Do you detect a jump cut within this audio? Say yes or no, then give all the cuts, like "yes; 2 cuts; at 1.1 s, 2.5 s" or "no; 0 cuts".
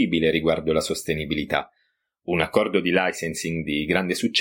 no; 0 cuts